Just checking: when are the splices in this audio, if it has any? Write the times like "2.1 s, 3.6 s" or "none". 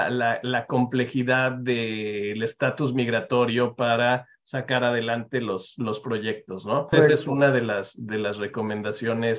6.9 s